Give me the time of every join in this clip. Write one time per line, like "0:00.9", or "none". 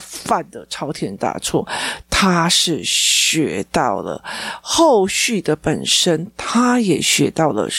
0:02.0